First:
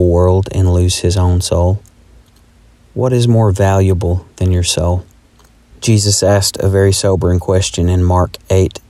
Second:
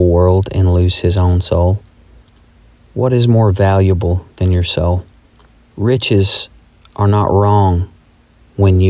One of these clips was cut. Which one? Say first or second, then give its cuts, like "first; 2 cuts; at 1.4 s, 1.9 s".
first; 1 cut; at 5.7 s